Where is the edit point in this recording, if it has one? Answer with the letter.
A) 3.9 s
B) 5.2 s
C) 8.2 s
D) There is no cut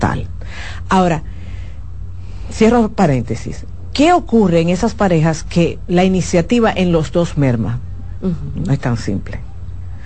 C